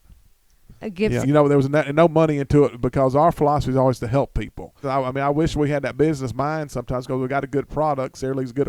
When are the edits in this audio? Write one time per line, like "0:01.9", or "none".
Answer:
0:01.2
0:04.8